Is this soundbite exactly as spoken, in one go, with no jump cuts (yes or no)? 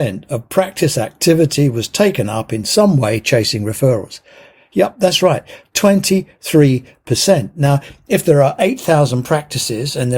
yes